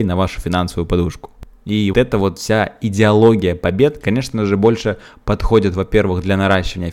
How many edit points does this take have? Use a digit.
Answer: 1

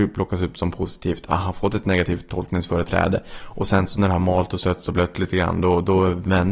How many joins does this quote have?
0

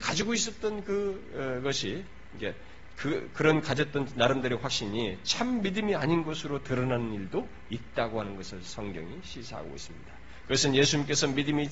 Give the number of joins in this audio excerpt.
1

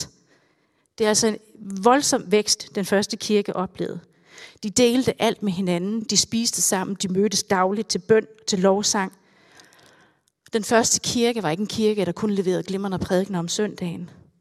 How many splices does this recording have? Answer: 0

